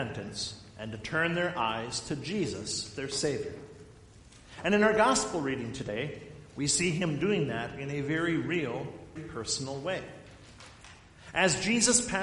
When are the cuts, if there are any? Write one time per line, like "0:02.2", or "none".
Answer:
0:09.2